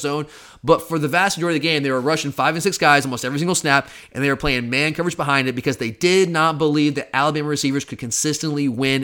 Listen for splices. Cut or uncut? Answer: uncut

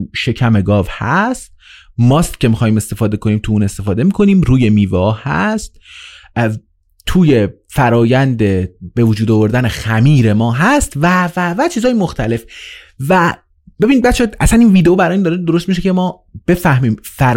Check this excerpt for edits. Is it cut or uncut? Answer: uncut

